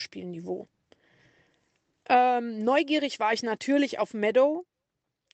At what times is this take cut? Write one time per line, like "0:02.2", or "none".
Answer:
none